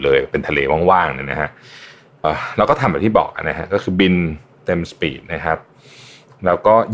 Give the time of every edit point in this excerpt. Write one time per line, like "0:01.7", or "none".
0:02.2